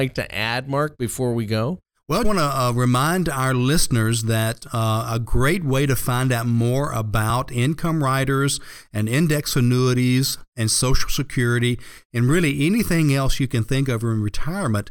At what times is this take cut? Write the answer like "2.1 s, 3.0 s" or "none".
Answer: 2.2 s